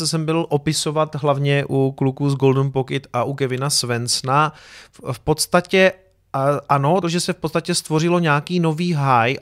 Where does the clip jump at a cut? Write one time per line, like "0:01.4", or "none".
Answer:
0:07.0